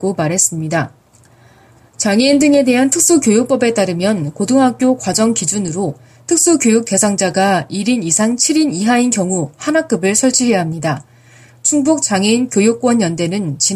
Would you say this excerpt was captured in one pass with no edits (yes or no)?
yes